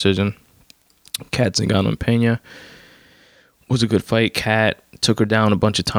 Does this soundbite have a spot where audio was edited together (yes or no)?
no